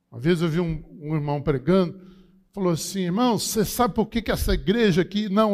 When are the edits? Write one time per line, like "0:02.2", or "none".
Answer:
none